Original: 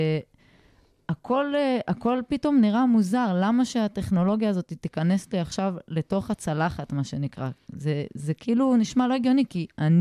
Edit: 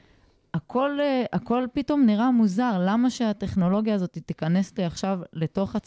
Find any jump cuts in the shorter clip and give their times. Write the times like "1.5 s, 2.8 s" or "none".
none

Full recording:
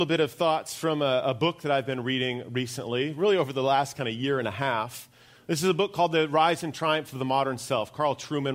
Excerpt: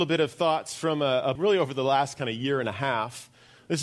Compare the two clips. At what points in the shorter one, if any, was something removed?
1.4 s

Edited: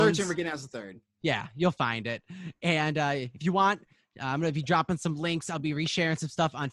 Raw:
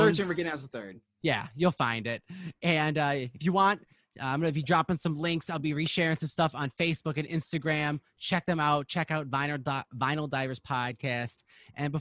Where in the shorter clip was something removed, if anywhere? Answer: none

